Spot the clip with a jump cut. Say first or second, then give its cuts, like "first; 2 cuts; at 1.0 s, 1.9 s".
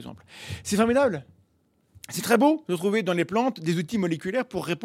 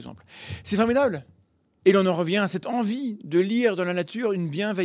second; 1 cut; at 1.8 s